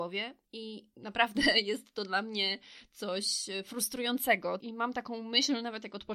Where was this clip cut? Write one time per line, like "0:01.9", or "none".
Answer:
0:04.6